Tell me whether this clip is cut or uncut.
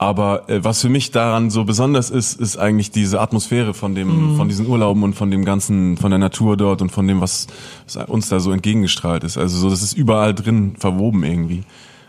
uncut